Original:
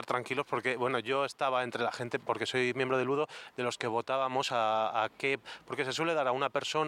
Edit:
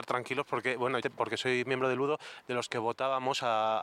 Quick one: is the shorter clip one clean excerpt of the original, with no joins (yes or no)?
no